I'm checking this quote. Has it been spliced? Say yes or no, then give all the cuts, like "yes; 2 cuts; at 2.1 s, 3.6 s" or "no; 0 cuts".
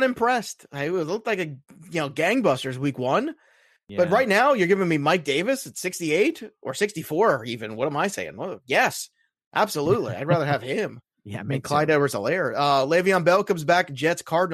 no; 0 cuts